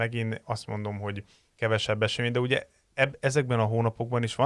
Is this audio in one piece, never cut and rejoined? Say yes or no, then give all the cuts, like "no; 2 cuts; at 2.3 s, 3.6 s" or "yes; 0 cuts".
yes; 0 cuts